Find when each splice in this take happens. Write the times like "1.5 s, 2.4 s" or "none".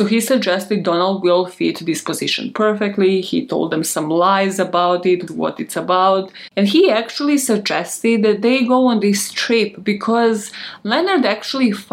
5.3 s, 6.5 s